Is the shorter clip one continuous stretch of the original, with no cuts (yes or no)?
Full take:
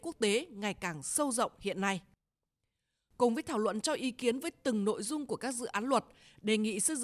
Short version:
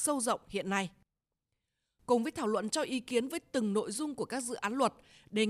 yes